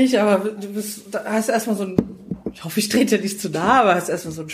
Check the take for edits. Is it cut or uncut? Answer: uncut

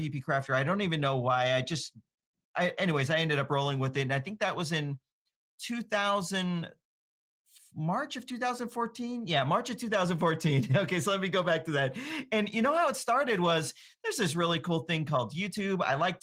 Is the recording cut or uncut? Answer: uncut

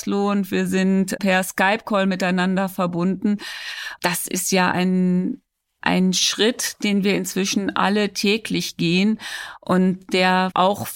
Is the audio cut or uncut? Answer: uncut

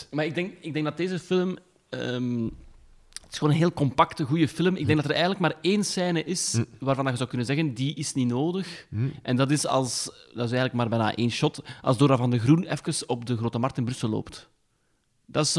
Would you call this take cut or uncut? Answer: uncut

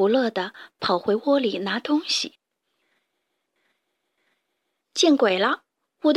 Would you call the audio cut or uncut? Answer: uncut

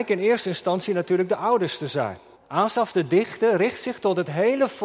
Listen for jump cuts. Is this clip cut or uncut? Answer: cut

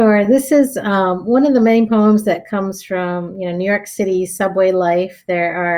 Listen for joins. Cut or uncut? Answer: uncut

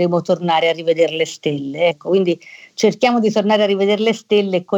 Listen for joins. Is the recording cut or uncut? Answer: cut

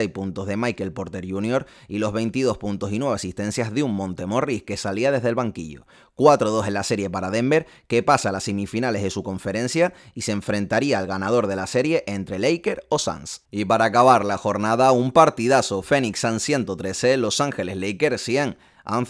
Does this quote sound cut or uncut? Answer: uncut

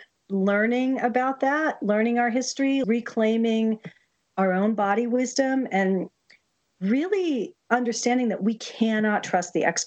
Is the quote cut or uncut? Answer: cut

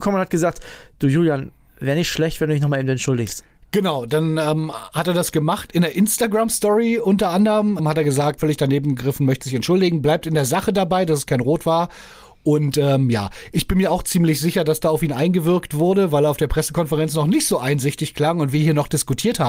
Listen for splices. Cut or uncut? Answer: cut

